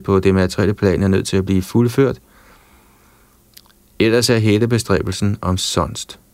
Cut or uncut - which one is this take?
uncut